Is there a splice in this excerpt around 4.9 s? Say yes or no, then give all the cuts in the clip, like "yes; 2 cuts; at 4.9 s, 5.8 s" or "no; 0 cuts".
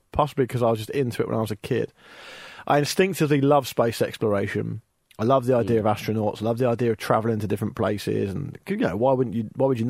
no; 0 cuts